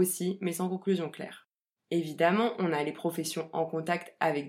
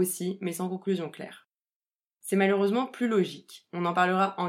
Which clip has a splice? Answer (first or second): first